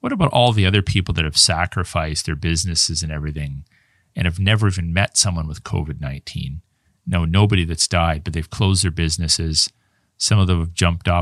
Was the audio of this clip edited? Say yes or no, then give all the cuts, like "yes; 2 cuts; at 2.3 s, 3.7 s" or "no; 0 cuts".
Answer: no; 0 cuts